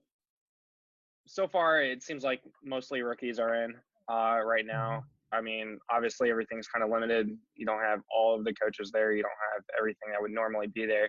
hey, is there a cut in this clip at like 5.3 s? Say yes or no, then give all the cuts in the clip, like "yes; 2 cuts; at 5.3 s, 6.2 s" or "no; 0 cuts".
yes; 1 cut; at 5.3 s